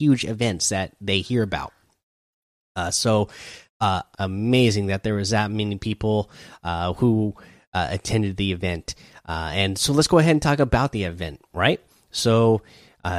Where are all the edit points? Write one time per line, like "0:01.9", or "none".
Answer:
0:04.1